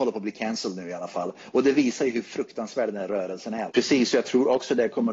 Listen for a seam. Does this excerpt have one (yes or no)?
yes